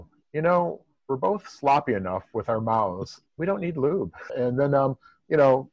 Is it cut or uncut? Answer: cut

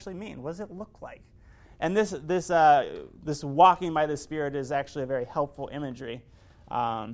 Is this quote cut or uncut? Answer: uncut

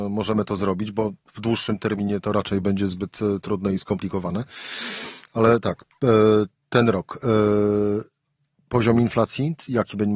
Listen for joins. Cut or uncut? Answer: uncut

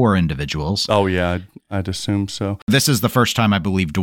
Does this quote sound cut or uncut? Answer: uncut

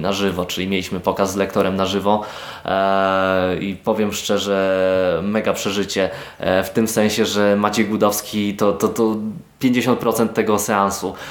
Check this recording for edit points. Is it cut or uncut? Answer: uncut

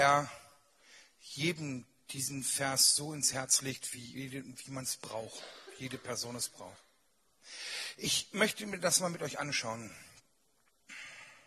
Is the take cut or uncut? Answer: uncut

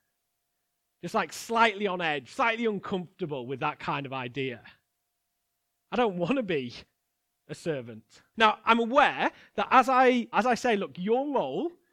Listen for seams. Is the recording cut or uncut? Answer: cut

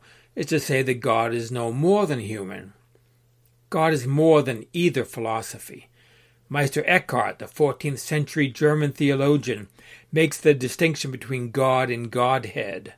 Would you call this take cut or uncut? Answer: uncut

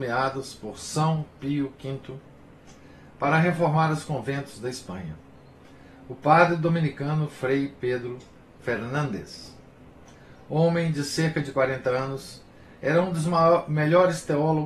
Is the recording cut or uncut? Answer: uncut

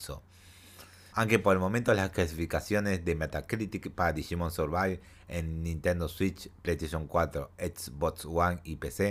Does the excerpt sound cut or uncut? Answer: cut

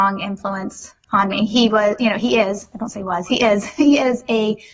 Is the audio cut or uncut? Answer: uncut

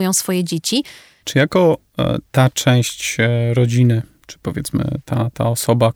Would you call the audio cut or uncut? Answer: cut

